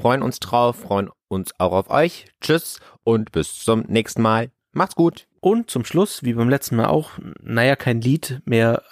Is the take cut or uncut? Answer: uncut